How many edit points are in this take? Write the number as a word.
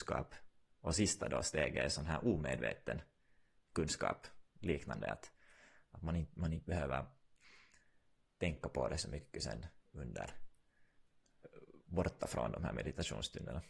one